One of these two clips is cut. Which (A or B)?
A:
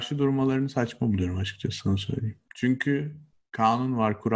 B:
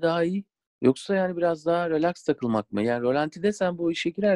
A